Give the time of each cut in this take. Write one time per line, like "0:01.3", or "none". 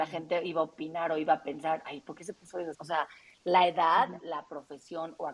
0:02.7

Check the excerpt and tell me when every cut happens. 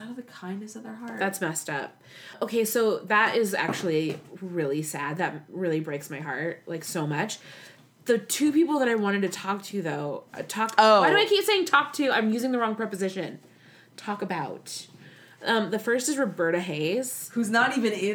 none

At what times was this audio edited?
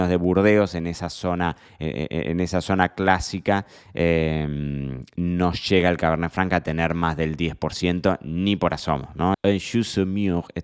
0:09.3

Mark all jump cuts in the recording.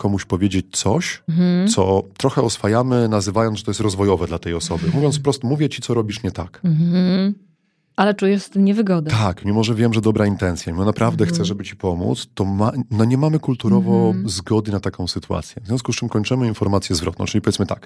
none

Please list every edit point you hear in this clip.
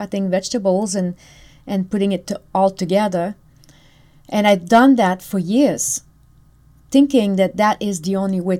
none

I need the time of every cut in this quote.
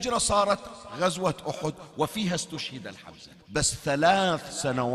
0:03.4

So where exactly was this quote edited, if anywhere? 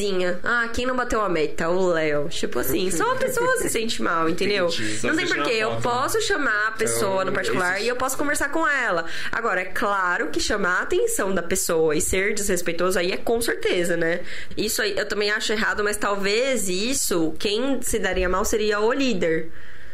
0:14.5

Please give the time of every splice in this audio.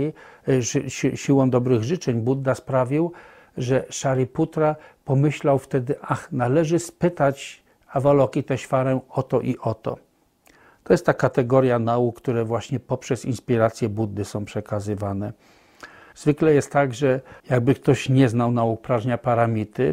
0:16.1
0:17.4

